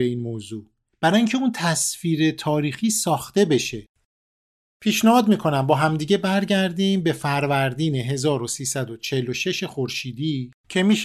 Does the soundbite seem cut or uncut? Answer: uncut